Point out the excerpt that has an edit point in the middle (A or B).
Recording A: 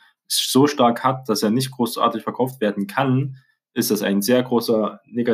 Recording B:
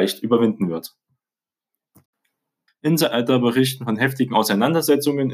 B